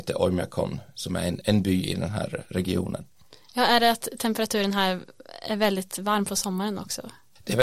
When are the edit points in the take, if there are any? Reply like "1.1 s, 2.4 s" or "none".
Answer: 1.4 s